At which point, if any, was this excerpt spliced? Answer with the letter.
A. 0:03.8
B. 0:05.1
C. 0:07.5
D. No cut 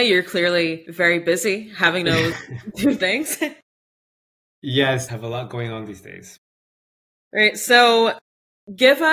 B